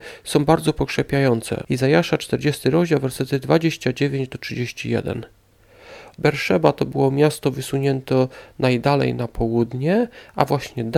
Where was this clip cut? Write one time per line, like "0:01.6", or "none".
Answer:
0:01.6
0:06.2